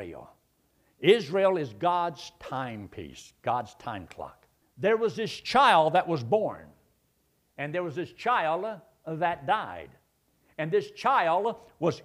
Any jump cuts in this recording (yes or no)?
yes